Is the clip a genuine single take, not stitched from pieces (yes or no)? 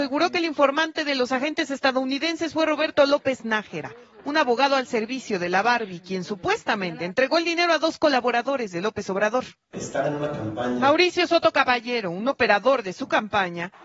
yes